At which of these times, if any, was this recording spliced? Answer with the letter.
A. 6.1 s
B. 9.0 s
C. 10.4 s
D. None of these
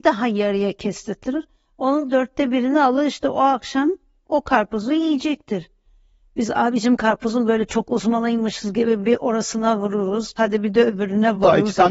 C